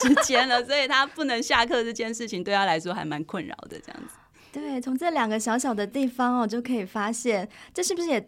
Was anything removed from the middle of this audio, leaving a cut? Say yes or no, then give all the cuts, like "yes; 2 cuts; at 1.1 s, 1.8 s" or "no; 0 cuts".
no; 0 cuts